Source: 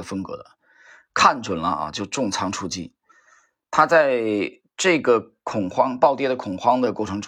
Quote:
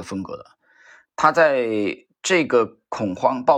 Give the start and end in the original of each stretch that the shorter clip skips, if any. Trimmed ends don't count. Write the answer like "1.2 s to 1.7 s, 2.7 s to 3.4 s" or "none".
1.0 s to 3.6 s

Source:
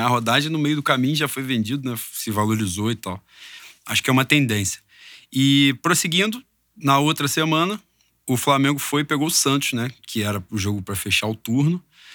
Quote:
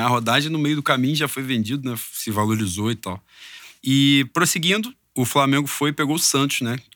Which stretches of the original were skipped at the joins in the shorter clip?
3.8 s to 5.3 s, 6.5 s to 8.1 s

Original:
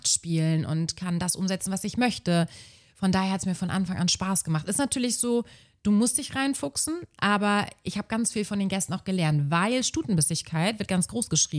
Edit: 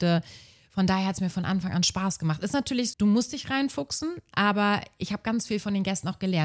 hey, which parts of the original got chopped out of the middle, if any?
5.2 s to 5.8 s

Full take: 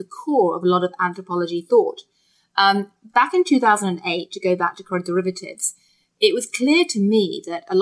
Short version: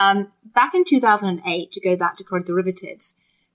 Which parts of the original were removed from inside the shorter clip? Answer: none

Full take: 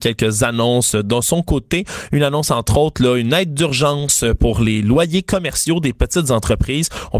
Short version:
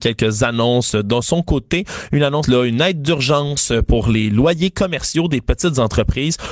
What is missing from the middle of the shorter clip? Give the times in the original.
2.4 s to 3.0 s

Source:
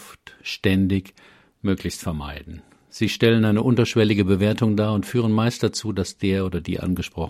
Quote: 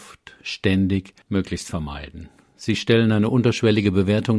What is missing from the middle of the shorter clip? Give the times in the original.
1.2 s to 1.5 s

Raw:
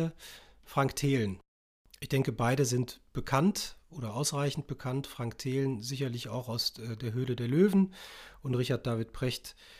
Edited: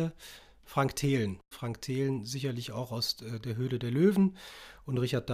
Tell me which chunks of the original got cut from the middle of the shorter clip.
1.5 s to 5.1 s

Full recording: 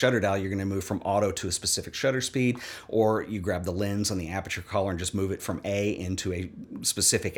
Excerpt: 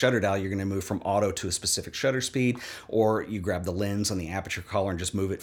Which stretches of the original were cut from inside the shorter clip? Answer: none

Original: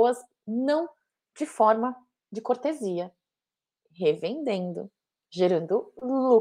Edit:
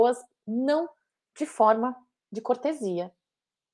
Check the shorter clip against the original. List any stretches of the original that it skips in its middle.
none

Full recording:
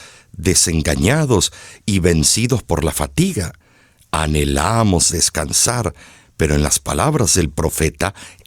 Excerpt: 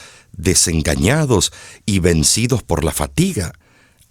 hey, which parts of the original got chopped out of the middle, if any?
none

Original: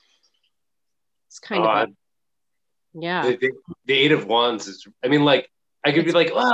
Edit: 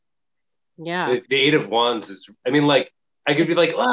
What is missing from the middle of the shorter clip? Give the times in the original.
3.4 s to 3.8 s

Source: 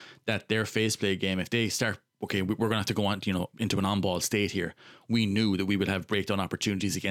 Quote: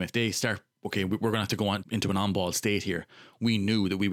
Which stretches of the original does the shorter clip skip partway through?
3.2 s to 3.5 s

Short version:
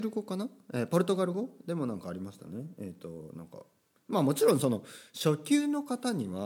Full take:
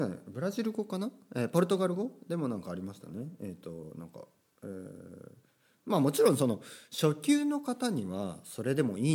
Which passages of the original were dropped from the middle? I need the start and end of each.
4.6 s to 5.7 s

